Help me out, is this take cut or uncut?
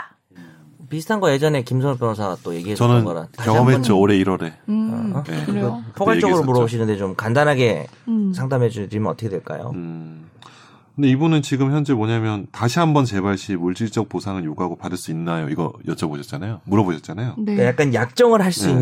cut